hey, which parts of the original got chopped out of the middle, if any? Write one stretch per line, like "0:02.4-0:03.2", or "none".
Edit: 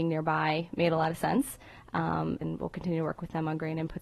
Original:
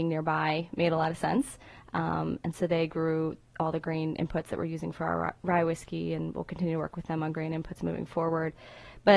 0:02.4-0:06.2